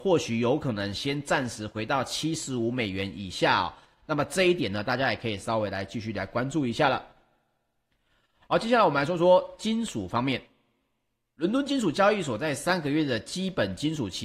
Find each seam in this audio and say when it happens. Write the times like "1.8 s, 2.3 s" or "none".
none